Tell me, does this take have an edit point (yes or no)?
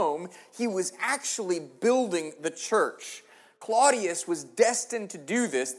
no